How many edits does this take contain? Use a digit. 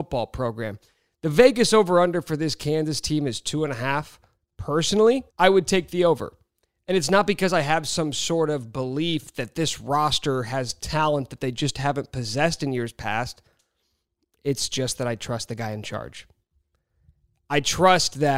1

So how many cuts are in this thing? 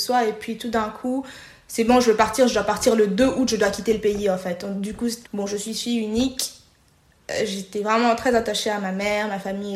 1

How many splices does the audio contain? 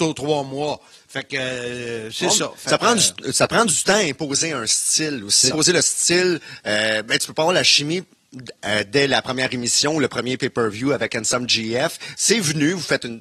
1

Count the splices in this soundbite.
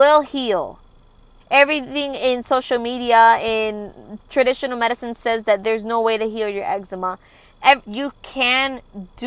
2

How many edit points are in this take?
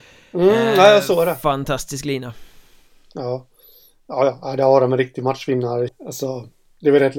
1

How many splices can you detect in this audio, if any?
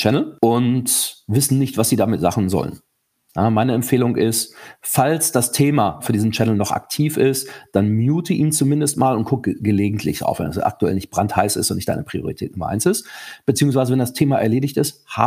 0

